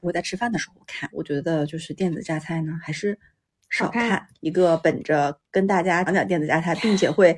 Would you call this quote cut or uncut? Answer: cut